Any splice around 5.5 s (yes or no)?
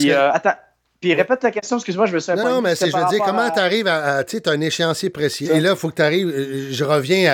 yes